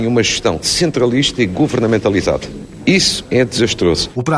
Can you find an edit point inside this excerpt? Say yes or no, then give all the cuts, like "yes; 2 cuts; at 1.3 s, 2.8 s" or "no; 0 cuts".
yes; 1 cut; at 2.8 s